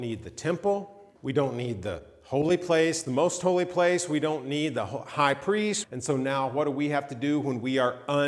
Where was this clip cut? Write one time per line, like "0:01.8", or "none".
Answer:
0:01.2
0:05.8